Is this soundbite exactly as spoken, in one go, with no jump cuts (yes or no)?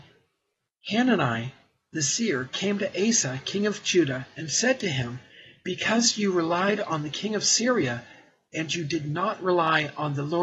yes